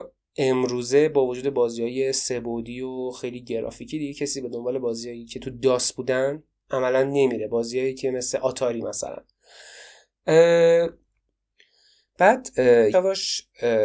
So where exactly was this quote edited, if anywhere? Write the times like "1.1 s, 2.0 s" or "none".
12.9 s